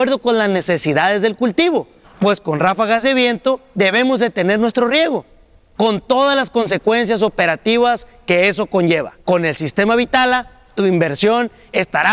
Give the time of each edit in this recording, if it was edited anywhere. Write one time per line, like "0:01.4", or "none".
0:02.0
0:09.2